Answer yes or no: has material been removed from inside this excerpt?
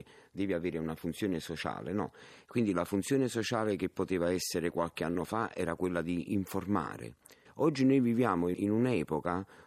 yes